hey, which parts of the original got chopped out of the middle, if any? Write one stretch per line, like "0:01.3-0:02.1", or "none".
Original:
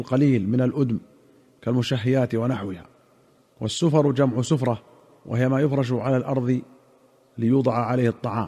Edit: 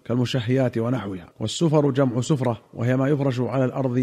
0:02.9-0:03.5
0:04.9-0:05.2